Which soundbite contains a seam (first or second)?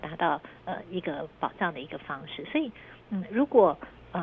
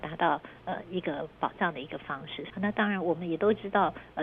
second